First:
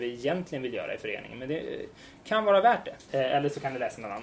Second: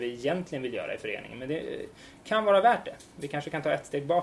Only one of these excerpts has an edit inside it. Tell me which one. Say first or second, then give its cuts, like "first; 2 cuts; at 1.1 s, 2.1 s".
first; 1 cut; at 3.1 s